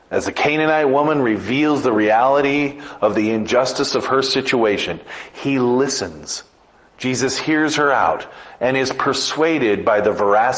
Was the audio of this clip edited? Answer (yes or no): no